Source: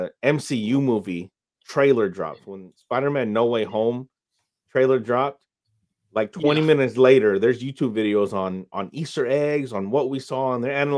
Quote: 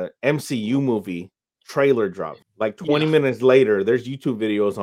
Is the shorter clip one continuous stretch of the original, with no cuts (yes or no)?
no